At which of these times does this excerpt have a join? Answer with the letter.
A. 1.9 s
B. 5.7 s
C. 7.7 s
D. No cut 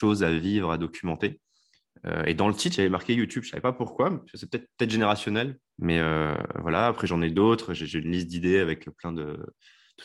B